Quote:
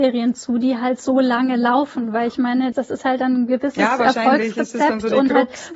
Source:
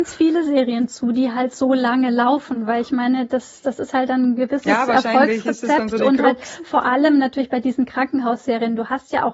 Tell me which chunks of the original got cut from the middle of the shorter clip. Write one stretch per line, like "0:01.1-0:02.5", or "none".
0:03.3-0:03.6